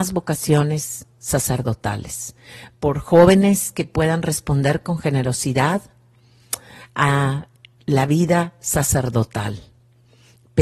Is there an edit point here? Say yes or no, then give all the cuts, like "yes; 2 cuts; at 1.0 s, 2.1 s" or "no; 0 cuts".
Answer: no; 0 cuts